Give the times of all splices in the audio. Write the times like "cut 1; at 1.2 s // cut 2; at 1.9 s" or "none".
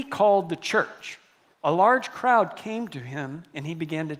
cut 1; at 1.5 s